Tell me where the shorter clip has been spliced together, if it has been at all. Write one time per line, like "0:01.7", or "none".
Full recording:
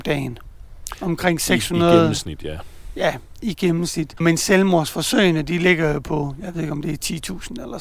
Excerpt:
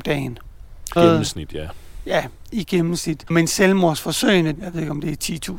0:01.0
0:04.5